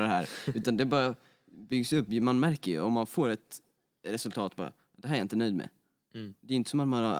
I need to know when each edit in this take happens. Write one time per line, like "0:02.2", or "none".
none